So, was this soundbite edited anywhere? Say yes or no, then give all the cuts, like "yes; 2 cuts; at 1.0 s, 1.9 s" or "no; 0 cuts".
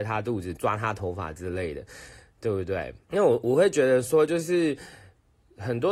yes; 1 cut; at 3.0 s